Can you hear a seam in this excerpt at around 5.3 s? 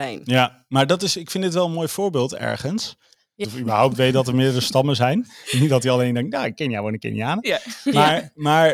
no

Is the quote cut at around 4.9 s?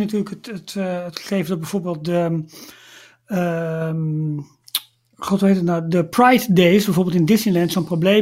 no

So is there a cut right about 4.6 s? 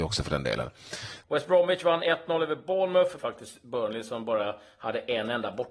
no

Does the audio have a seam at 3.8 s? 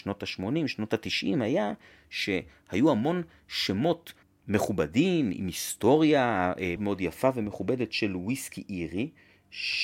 no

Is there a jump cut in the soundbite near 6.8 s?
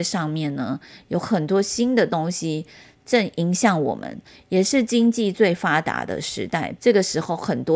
yes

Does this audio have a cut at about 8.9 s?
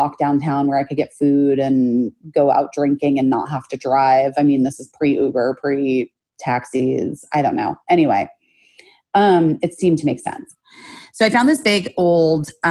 no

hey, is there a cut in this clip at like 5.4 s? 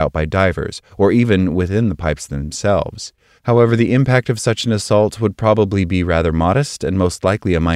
no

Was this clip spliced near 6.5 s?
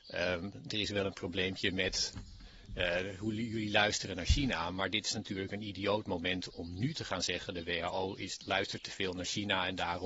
yes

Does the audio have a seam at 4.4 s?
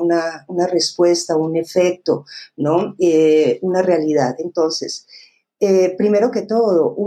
no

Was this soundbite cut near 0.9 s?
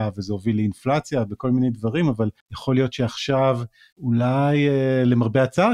no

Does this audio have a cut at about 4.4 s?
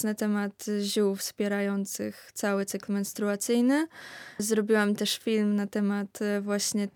yes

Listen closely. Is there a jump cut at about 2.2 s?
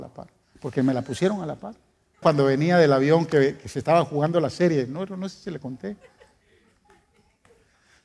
yes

